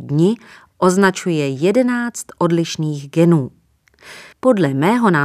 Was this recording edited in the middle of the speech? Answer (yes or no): yes